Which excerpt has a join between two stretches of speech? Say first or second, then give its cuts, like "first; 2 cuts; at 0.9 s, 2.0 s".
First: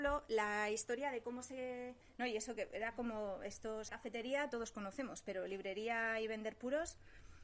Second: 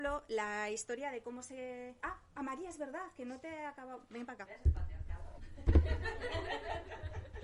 first; 2 cuts; at 2.0 s, 3.9 s